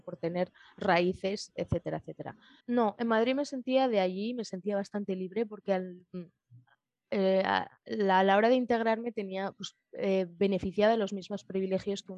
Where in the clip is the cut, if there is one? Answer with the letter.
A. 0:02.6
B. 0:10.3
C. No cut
A